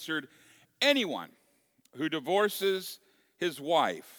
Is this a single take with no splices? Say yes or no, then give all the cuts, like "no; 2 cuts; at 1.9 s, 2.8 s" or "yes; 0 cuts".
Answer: yes; 0 cuts